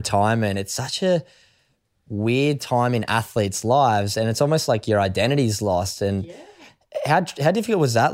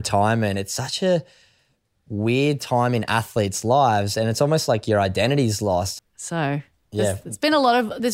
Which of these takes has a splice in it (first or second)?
second